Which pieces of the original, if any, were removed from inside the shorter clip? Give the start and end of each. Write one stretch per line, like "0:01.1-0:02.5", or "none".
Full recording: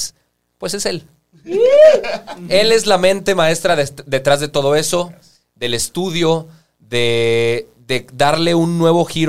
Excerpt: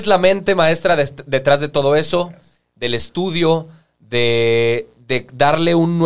none

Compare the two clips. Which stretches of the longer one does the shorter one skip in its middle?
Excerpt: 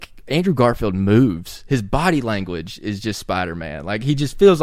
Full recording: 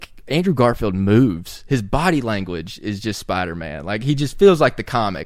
none

